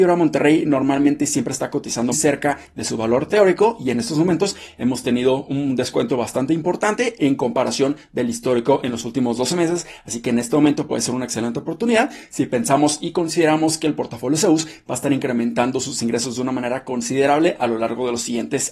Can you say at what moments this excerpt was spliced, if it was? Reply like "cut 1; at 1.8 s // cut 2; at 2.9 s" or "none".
cut 1; at 2.1 s